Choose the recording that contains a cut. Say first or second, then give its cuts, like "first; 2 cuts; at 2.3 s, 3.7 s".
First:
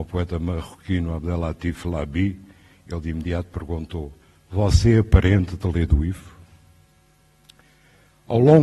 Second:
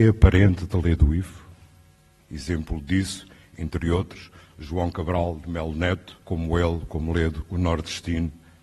second; 2 cuts; at 2.2 s, 6.2 s